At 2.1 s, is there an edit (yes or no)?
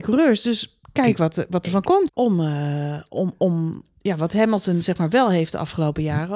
yes